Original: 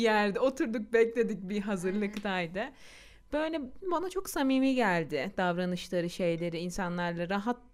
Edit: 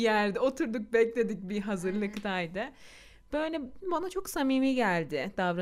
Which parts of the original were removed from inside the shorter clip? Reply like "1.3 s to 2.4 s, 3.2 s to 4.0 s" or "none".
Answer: none

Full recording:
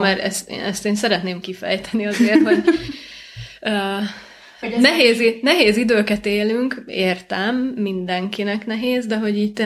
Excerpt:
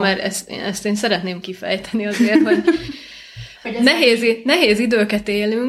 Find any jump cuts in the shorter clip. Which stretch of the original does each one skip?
3.5 s to 4.5 s

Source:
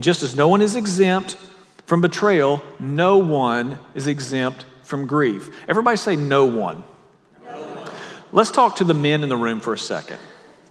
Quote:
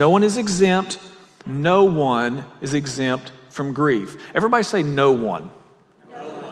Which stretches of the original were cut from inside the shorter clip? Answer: 1.8 s to 2.8 s

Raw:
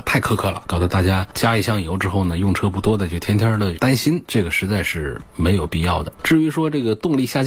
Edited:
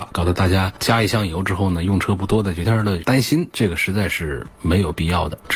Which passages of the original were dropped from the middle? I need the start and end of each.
3.2 s to 3.4 s

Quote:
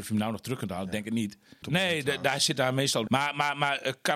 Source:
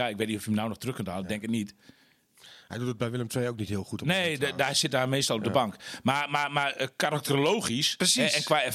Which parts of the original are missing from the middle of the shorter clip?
2.0 s to 4.0 s, 5.4 s to 6.0 s

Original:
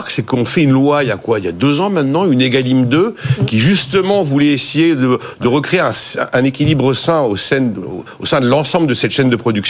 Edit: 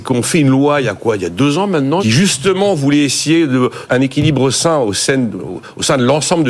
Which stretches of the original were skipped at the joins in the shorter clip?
2.2 s to 3.5 s, 5.4 s to 6.3 s

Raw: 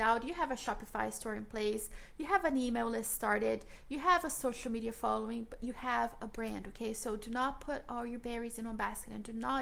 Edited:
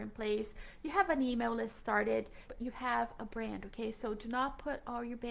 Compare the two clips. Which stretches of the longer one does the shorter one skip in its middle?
3.8 s to 5.5 s

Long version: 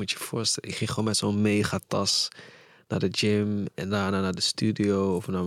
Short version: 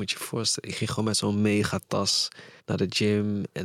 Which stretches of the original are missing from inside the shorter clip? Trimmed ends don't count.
2.6 s to 2.8 s

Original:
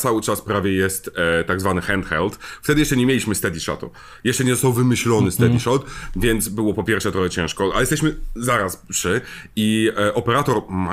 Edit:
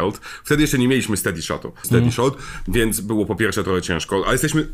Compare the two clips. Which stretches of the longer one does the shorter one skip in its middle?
4.0 s to 5.3 s

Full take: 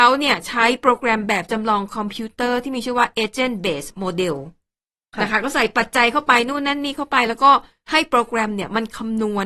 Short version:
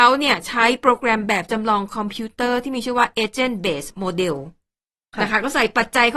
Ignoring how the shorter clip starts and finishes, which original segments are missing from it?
none

